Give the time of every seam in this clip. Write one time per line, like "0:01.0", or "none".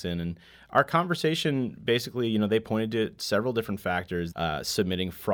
0:04.3